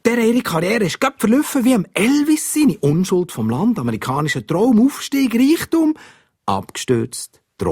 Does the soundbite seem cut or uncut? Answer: uncut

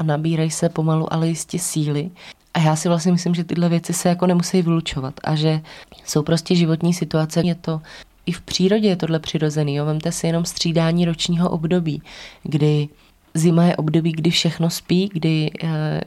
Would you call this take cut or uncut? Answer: cut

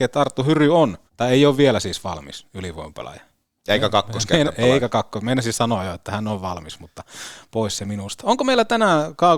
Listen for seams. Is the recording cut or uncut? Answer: cut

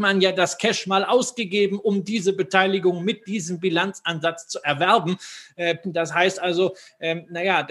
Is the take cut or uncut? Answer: uncut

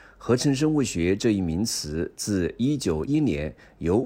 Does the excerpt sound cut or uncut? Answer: cut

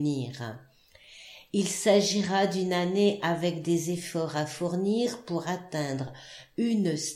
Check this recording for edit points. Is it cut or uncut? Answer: uncut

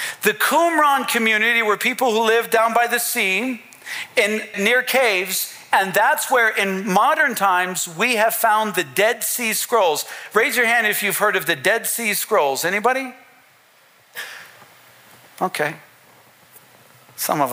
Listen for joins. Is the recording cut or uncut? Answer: cut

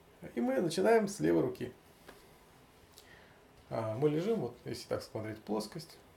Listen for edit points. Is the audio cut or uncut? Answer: uncut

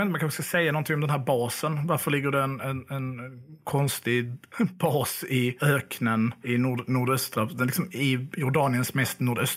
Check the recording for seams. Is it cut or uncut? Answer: uncut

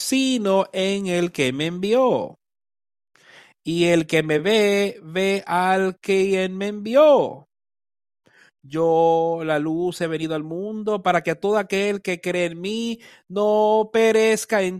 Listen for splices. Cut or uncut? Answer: uncut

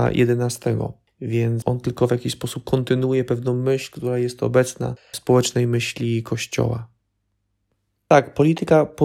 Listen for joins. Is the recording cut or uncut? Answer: uncut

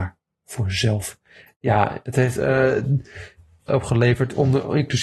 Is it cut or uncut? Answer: cut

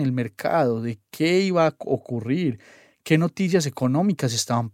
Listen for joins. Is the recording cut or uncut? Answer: uncut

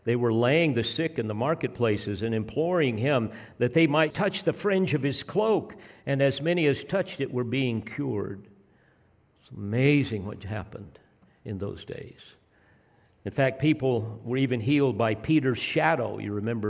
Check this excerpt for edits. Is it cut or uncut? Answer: cut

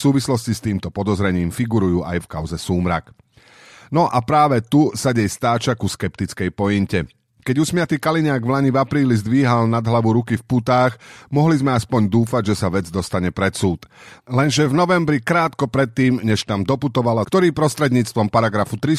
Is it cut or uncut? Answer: cut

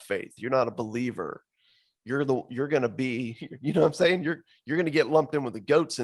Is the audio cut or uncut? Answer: uncut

